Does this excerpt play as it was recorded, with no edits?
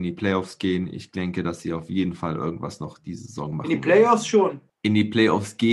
yes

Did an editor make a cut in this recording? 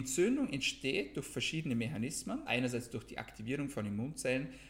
yes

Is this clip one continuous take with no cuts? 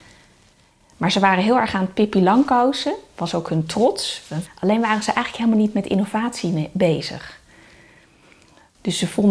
no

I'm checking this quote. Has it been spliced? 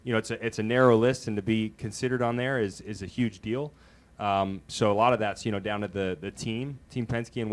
no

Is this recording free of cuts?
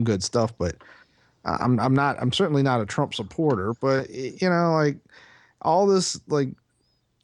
yes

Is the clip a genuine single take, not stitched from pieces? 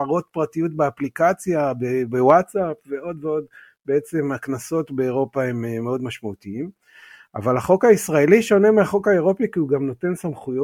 yes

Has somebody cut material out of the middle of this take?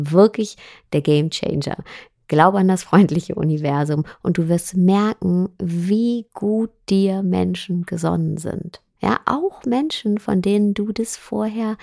no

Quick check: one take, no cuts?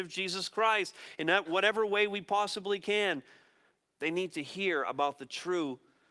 no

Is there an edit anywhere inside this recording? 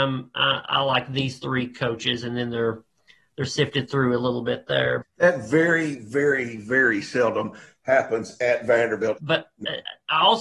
yes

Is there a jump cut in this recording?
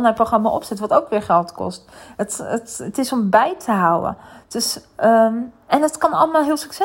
no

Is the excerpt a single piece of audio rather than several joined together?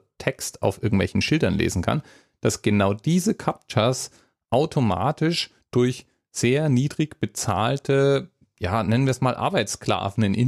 yes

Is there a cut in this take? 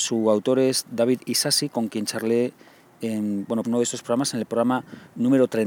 yes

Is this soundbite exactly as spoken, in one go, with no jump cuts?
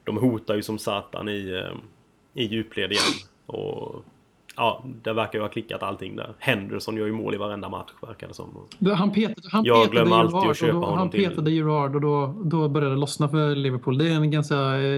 yes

